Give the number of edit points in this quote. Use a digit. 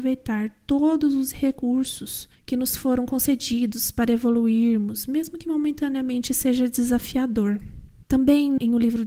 1